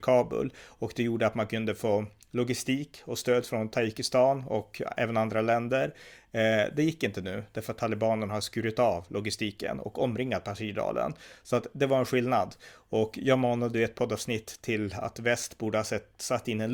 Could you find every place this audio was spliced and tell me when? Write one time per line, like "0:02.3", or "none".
none